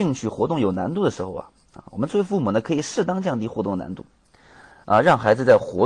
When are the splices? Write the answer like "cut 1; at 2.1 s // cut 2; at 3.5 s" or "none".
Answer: none